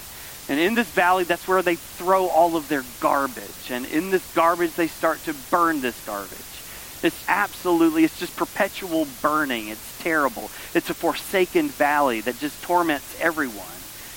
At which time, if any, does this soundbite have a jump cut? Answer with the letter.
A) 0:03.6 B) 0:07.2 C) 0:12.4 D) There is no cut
B